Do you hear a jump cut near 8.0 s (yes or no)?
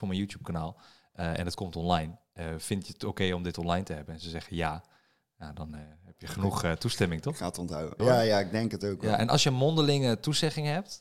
yes